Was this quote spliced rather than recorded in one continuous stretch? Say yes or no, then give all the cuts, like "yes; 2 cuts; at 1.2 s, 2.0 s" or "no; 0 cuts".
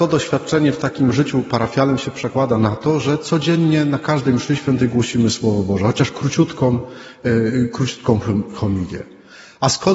no; 0 cuts